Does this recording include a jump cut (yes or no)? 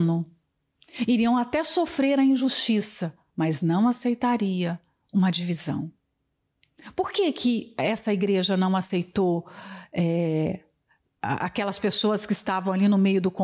no